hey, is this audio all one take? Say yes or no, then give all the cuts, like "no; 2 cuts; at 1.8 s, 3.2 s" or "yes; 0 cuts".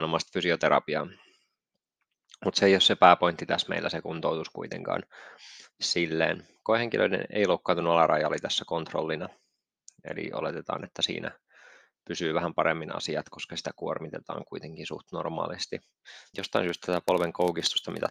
no; 1 cut; at 16.3 s